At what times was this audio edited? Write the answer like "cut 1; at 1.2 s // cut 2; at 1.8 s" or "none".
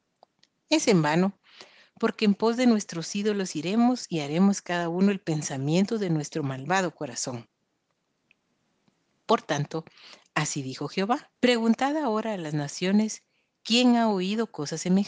cut 1; at 11.4 s